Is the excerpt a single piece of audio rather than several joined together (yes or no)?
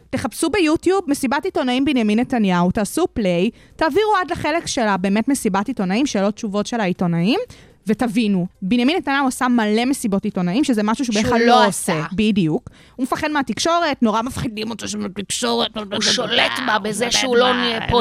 no